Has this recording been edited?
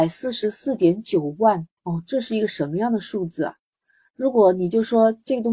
yes; 1 cut; at 1.8 s

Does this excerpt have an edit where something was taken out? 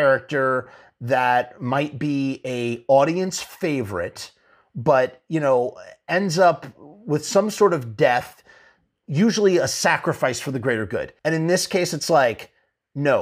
yes; 1 cut; at 11.2 s

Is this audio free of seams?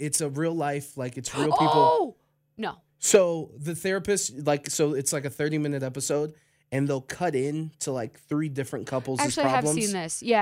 yes; 0 cuts

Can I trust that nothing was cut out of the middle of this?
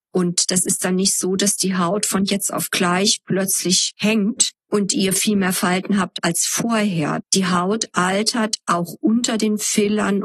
no; 1 cut; at 7.2 s

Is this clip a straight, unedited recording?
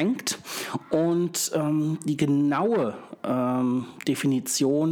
yes; 0 cuts

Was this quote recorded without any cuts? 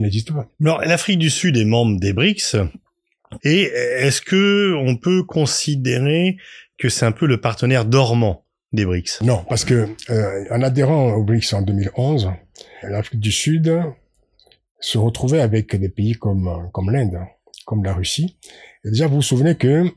no; 2 cuts; at 3.4 s, 12.8 s

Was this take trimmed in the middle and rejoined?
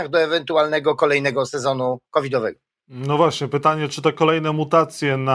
no; 0 cuts

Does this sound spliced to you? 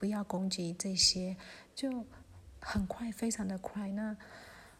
no; 0 cuts

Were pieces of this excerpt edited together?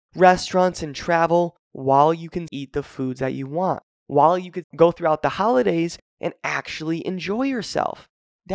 yes; 2 cuts; at 2.5 s, 4.6 s

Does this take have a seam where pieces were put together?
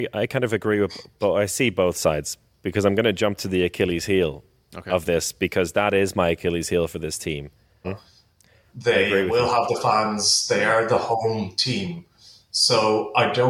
yes; 1 cut; at 7.8 s

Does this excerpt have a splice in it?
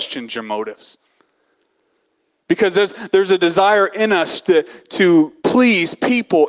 yes; 1 cut; at 5.4 s

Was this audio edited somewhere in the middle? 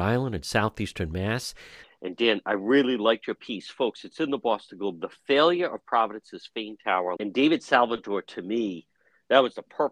yes; 2 cuts; at 1.8 s, 7.2 s

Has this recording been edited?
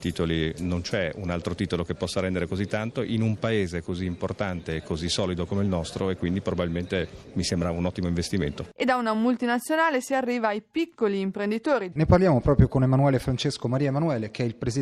yes; 1 cut; at 11.9 s

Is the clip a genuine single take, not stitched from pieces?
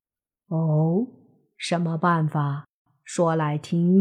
yes; 0 cuts

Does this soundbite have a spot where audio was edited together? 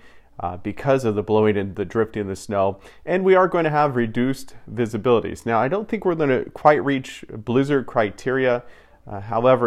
no; 0 cuts

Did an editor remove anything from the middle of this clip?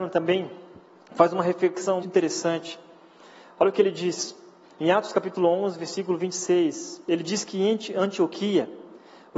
yes; 1 cut; at 2.0 s

